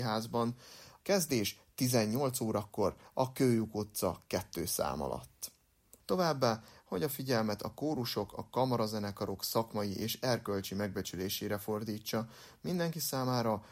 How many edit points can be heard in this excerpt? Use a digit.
2